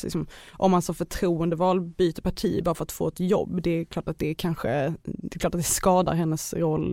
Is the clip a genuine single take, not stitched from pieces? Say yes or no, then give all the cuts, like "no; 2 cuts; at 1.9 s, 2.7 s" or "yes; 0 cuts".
yes; 0 cuts